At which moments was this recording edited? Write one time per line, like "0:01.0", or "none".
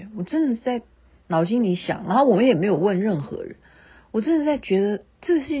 none